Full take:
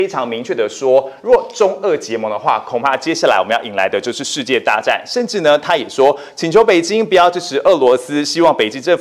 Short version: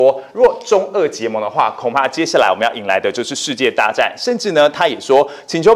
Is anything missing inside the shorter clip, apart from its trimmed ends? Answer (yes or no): no